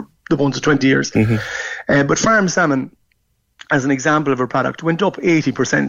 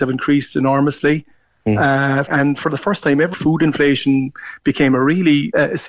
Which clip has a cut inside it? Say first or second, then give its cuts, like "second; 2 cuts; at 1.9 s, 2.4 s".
second; 2 cuts; at 2.3 s, 3.3 s